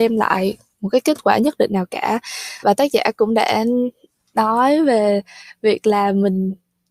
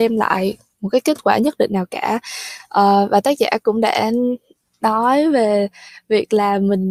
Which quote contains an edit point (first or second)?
first